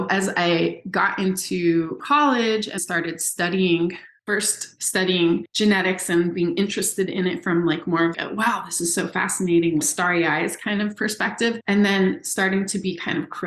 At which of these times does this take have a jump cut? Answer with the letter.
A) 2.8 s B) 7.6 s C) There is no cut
A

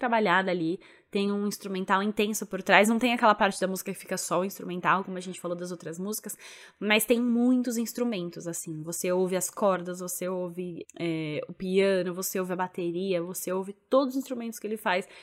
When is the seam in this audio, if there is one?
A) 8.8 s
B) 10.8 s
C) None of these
B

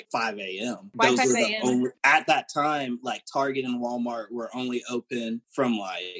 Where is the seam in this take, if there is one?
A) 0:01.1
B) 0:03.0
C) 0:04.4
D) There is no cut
D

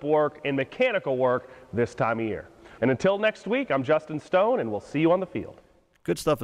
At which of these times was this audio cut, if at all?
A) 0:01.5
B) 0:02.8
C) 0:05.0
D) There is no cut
B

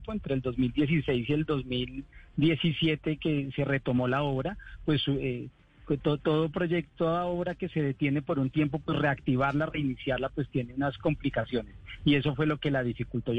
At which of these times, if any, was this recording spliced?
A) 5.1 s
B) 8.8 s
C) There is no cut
C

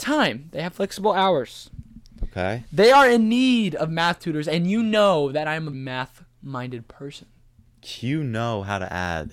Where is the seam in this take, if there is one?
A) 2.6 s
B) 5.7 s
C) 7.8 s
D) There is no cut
B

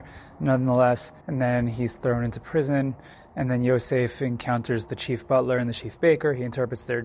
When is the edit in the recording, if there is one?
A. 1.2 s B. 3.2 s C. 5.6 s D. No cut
A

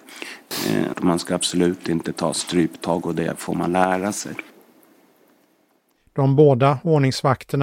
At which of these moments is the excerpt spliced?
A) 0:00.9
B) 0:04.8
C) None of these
A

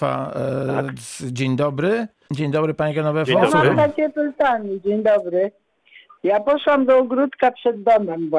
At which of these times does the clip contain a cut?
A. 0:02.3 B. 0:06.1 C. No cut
A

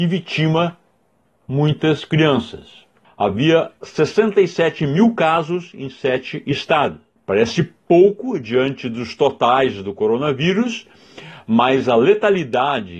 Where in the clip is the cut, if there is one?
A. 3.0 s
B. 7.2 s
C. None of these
A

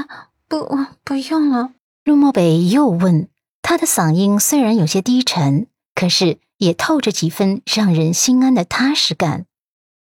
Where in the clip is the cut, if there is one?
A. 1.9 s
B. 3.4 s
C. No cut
A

